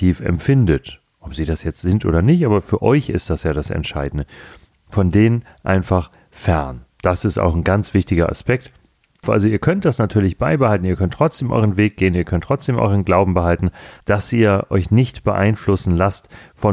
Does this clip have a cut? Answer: yes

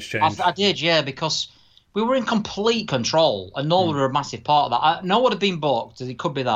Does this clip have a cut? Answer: no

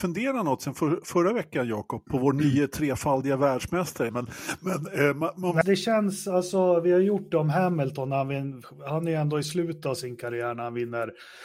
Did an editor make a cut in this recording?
yes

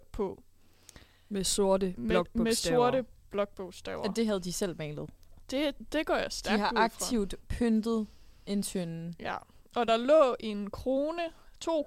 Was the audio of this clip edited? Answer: no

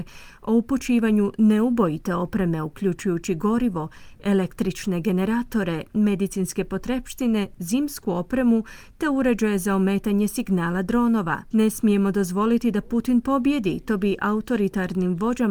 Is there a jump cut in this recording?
yes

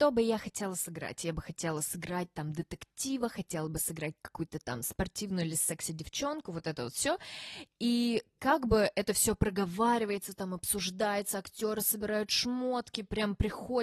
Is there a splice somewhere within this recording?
no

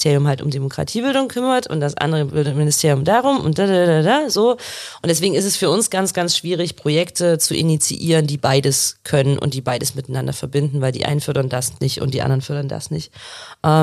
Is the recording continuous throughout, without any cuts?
yes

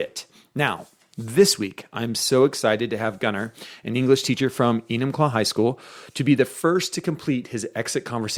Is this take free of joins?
yes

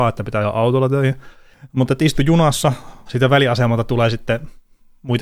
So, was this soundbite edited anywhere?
yes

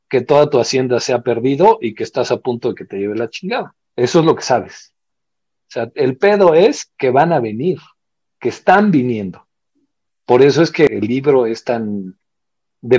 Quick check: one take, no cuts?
no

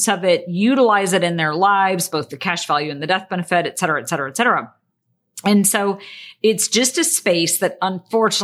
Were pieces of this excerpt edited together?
no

